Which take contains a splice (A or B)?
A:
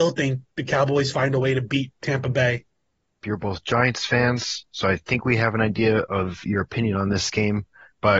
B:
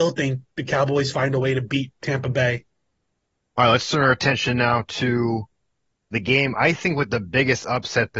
A